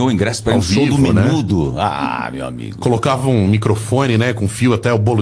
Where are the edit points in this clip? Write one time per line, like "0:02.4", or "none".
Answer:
none